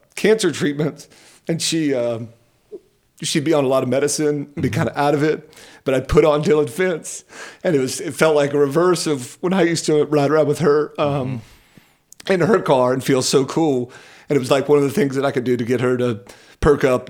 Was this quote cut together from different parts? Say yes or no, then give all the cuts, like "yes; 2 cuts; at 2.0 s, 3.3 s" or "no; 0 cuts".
no; 0 cuts